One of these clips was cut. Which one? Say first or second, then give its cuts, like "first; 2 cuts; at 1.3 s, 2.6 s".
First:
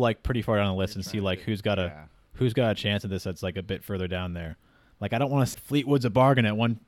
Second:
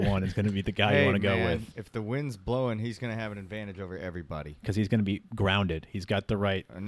first; 1 cut; at 5.5 s